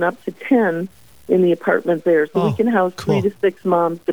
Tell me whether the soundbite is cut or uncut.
uncut